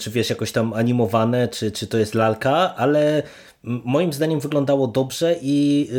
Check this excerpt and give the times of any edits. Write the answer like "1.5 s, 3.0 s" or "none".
none